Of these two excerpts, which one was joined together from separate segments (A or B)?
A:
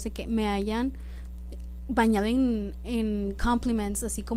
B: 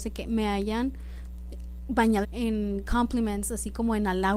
B